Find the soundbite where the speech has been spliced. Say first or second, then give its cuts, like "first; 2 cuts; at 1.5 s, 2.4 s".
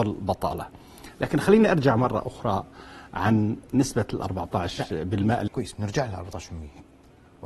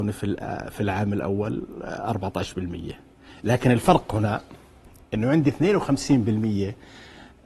first; 1 cut; at 5.5 s